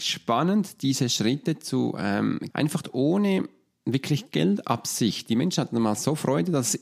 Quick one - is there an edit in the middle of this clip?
yes; 1 cut; at 2.5 s

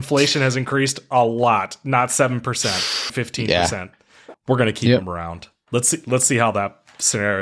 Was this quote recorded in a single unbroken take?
no; 2 cuts; at 3.1 s, 4.3 s

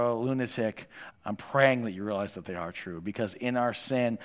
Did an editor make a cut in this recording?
yes; 1 cut; at 1.1 s

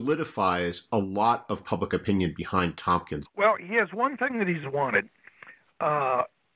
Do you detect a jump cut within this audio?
yes; 2 cuts; at 3.2 s, 4.6 s

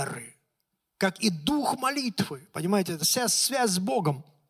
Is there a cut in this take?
yes; 1 cut; at 3.0 s

